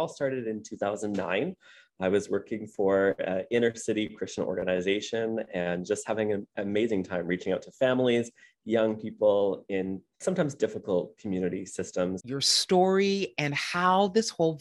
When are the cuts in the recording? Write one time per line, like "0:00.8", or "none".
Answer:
0:12.2